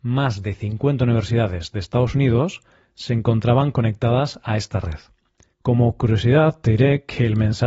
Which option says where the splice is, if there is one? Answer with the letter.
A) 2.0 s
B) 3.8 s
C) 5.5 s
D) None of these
C